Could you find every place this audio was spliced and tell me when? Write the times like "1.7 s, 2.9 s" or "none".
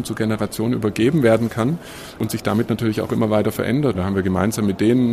3.9 s